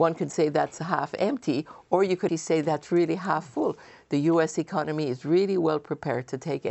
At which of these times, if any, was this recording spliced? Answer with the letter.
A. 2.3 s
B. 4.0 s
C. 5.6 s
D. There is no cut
A